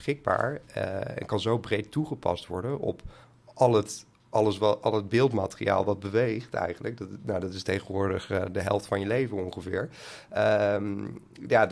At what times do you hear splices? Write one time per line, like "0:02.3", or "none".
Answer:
none